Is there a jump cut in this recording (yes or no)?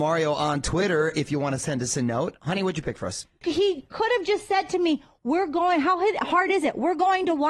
yes